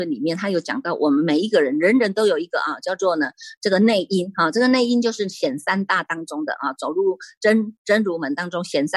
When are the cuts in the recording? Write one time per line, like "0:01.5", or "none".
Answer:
none